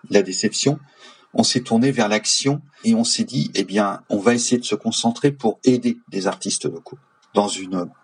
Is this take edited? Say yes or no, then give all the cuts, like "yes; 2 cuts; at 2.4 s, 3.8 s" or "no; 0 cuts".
yes; 2 cuts; at 2.8 s, 4.0 s